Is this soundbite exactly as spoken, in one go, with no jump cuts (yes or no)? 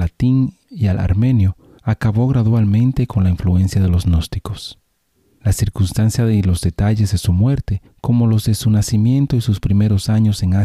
yes